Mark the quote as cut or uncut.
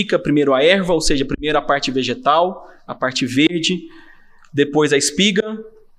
uncut